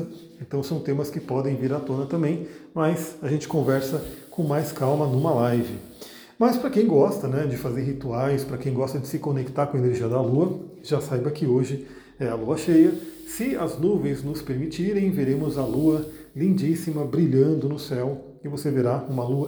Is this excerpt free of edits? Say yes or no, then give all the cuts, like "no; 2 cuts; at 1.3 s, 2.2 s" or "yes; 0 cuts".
yes; 0 cuts